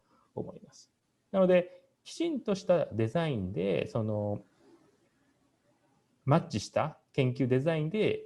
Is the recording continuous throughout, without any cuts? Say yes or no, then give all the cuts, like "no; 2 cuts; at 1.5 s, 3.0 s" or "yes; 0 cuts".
no; 1 cut; at 1.3 s